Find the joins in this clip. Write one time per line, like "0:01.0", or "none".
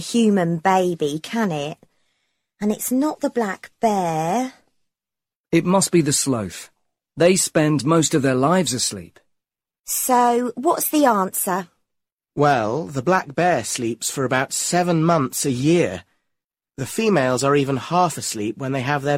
none